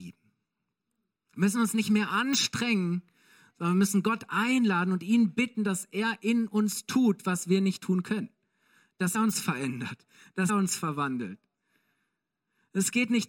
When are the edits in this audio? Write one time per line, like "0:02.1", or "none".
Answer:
0:09.1
0:10.5